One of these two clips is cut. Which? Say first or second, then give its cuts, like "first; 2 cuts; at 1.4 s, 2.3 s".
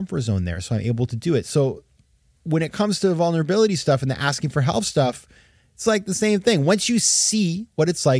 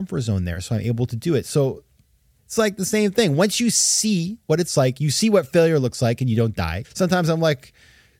second; 2 cuts; at 2.4 s, 6.8 s